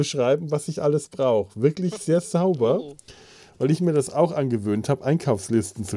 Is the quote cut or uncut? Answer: uncut